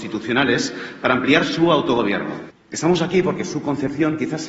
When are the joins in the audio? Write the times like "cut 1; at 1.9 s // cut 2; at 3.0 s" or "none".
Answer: cut 1; at 2.5 s